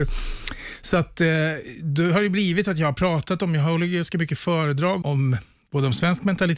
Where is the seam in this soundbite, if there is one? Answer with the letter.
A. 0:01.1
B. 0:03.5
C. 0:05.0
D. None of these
C